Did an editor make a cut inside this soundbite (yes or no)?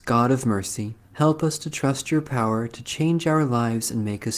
yes